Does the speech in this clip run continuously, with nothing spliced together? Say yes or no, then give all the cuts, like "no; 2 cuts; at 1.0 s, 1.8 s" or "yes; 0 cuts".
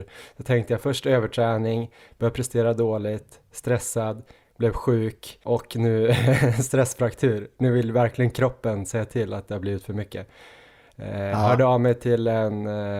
yes; 0 cuts